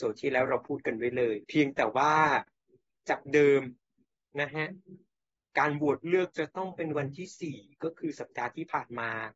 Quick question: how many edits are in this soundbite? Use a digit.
1